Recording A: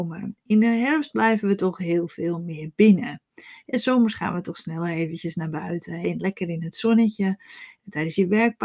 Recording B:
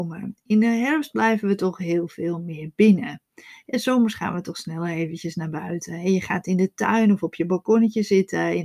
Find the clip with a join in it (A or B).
A